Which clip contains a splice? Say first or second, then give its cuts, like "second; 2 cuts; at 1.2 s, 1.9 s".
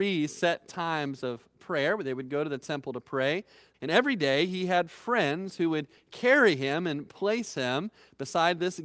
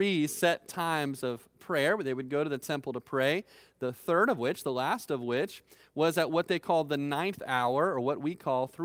first; 1 cut; at 3.7 s